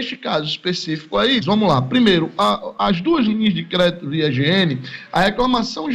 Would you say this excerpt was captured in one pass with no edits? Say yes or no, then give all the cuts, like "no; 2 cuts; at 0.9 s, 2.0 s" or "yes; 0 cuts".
no; 1 cut; at 1.4 s